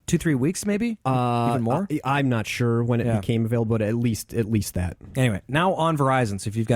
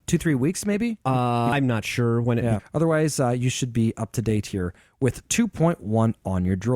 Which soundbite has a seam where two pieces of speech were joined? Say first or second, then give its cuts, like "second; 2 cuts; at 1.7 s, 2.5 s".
second; 2 cuts; at 1.5 s, 2.6 s